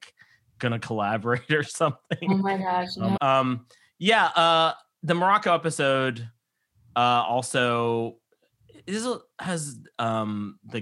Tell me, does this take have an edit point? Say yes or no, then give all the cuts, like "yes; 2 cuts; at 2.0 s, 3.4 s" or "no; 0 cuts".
yes; 1 cut; at 3.2 s